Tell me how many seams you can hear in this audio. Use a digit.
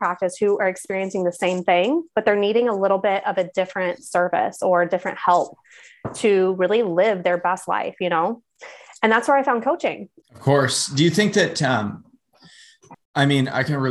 2